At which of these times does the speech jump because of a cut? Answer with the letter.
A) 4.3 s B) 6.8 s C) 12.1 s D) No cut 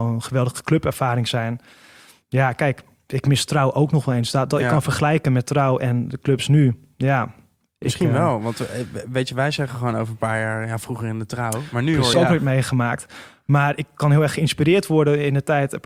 C